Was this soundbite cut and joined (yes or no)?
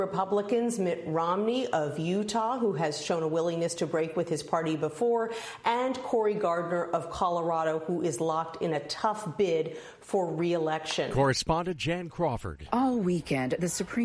no